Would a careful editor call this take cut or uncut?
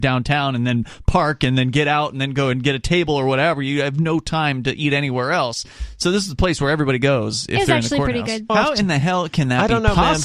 cut